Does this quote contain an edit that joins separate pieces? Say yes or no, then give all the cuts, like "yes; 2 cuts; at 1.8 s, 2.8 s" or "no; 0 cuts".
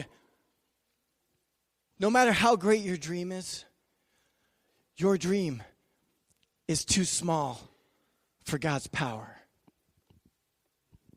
yes; 1 cut; at 1.9 s